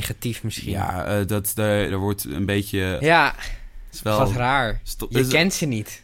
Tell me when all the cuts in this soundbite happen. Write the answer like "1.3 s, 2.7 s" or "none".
1.9 s, 3.0 s